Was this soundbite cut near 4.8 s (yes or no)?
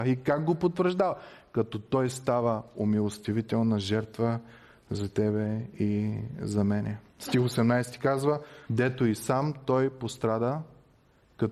no